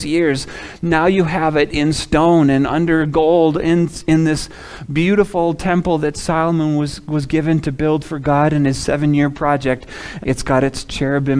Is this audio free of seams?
no; 1 cut; at 10.2 s

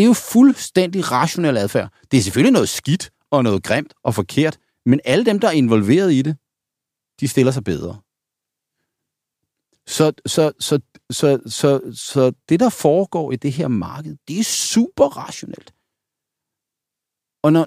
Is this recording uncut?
yes; 0 cuts

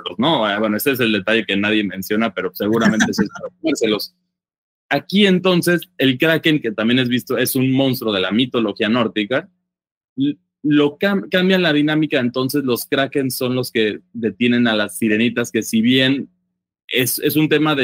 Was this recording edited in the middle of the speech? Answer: no; 0 cuts

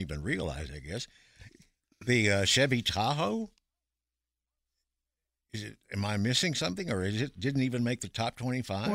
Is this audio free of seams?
yes; 0 cuts

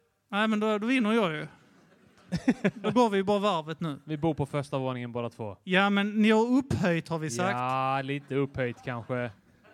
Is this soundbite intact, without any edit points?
yes; 0 cuts

